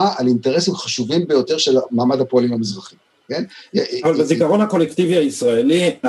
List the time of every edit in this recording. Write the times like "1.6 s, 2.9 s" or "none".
3.1 s